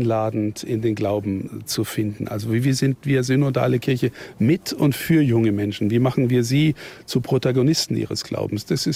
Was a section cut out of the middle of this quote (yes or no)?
no